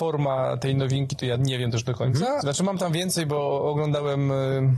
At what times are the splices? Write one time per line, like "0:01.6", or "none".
0:02.4